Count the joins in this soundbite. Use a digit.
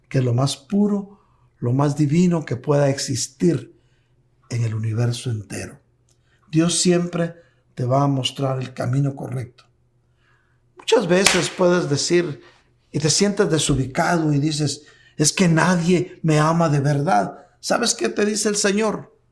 0